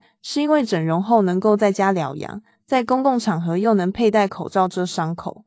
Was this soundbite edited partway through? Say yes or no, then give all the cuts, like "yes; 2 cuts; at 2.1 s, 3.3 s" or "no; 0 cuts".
no; 0 cuts